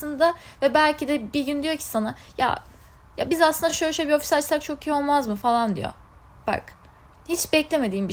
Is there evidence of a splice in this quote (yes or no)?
no